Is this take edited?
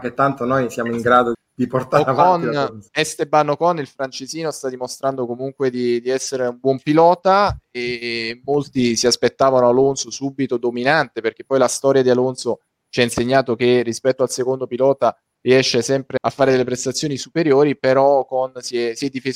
yes; 2 cuts; at 1.3 s, 16.2 s

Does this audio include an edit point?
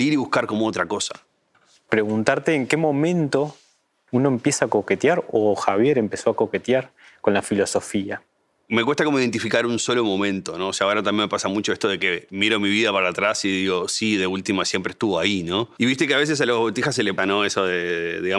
yes; 2 cuts; at 15.8 s, 17.2 s

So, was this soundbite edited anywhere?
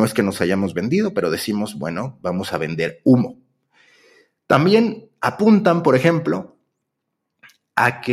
no; 0 cuts

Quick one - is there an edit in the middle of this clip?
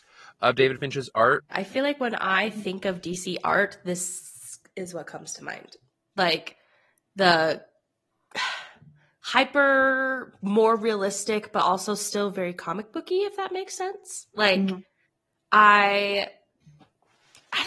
yes; 1 cut; at 1.5 s

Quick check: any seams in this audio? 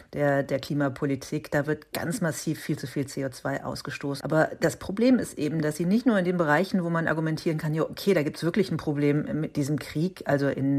yes; 1 cut; at 4.2 s

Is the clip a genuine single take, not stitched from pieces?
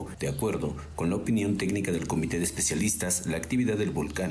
yes; 0 cuts

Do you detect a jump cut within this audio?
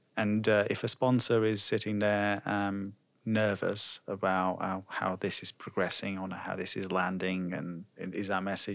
no; 0 cuts

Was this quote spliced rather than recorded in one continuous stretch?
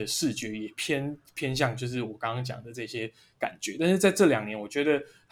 no; 0 cuts

